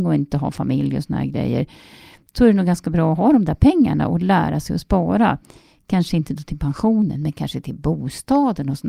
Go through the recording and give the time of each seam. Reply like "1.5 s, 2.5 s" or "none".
none